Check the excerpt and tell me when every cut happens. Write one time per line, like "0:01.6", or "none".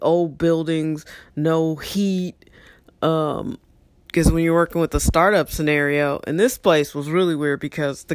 none

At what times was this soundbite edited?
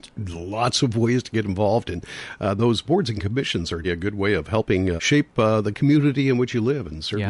0:03.8
0:05.0

